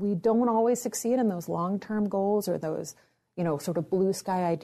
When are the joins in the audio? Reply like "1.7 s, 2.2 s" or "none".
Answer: none

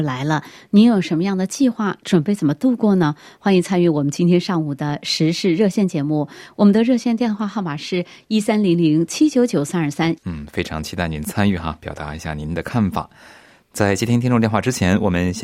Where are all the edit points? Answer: 10.2 s

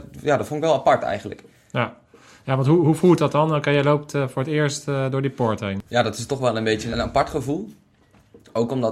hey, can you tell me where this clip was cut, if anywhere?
5.9 s, 6.9 s

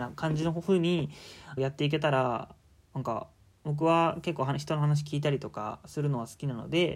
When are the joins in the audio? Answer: 1.6 s

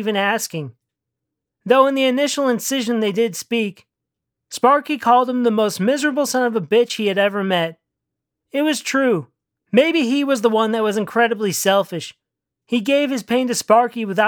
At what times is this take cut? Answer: 9.6 s

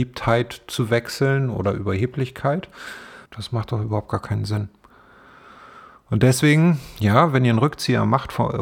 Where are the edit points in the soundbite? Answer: 3.3 s

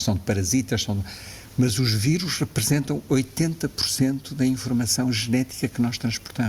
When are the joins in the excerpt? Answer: 1.6 s

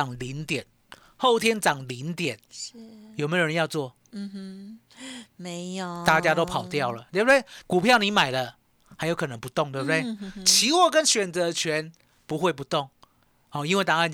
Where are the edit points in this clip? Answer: 7.6 s

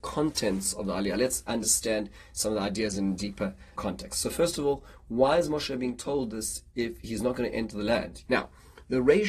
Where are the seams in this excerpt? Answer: 3.8 s, 8.3 s

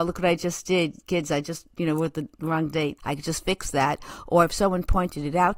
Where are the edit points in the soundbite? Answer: 3.0 s

